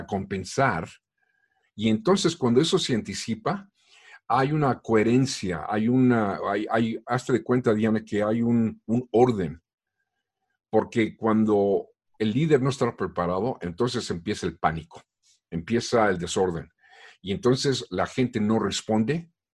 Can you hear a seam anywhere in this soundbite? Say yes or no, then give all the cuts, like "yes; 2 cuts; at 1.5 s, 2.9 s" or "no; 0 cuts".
no; 0 cuts